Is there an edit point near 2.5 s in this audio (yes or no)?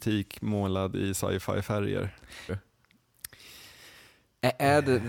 yes